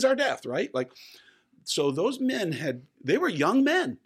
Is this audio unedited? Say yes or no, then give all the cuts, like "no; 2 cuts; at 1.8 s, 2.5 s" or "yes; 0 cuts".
yes; 0 cuts